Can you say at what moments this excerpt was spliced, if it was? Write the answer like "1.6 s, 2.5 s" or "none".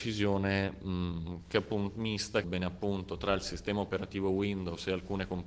2.4 s